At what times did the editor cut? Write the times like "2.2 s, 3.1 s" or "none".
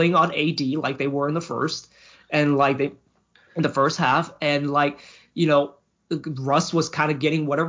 none